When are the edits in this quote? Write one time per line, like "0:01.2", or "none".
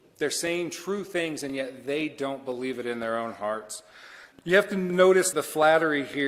0:04.3
0:05.3